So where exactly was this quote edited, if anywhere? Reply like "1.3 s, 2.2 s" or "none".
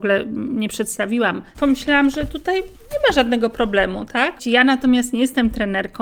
1.5 s, 4.4 s